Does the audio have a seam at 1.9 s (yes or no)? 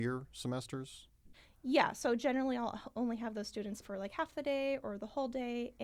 no